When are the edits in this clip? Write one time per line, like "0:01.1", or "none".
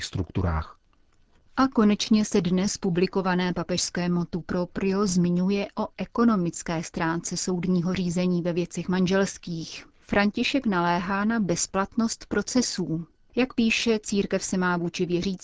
0:09.9